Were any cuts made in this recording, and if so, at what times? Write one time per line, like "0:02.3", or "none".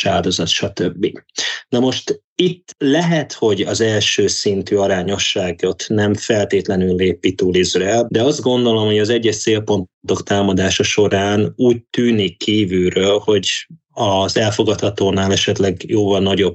0:02.3
0:08.1